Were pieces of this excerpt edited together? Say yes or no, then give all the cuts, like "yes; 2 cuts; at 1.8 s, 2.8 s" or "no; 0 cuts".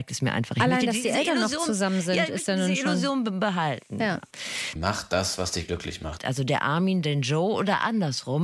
yes; 2 cuts; at 4.8 s, 6.2 s